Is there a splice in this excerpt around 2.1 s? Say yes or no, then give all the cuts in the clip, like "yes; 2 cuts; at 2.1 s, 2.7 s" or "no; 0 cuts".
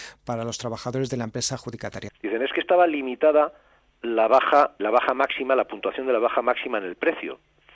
yes; 2 cuts; at 2.1 s, 4.8 s